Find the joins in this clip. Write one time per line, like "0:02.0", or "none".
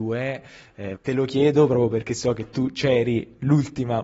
0:01.0